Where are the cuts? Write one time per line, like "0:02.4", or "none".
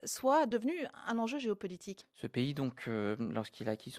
0:02.0

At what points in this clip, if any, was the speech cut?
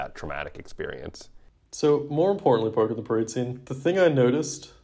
0:03.6

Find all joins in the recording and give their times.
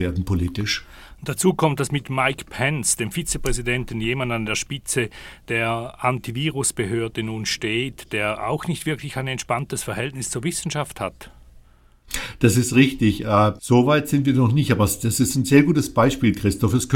0:13.6

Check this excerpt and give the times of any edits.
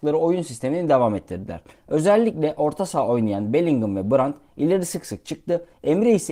none

